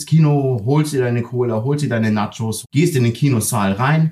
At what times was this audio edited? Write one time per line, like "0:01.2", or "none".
0:02.6